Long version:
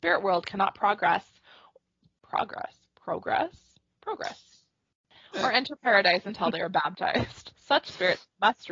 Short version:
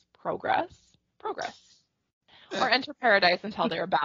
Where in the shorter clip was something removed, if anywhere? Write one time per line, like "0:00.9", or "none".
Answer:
none